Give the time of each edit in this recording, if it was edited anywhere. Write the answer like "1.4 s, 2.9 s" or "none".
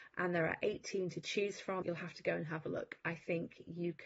1.8 s